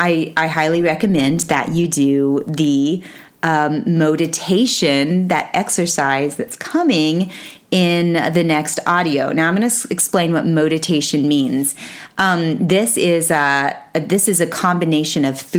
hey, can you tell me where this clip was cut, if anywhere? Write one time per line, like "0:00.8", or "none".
none